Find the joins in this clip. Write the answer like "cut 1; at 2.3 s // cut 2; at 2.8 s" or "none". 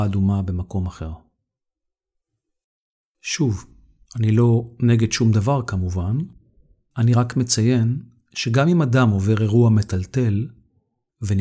cut 1; at 3.0 s